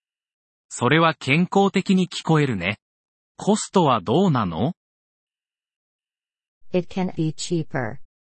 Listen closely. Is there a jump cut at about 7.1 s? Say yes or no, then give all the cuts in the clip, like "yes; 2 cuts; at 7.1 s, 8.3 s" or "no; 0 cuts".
yes; 1 cut; at 7.1 s